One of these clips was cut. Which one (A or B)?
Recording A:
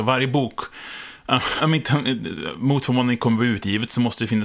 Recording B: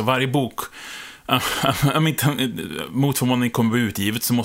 A